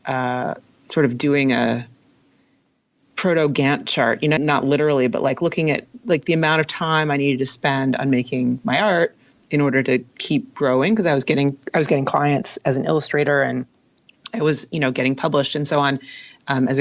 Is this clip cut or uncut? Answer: cut